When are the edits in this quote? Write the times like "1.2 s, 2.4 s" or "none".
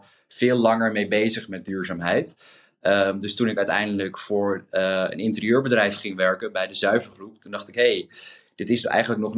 none